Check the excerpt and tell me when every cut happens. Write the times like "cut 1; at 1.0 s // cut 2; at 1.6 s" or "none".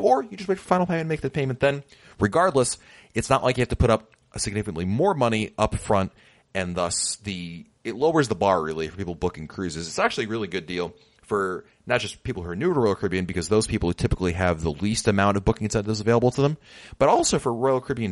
none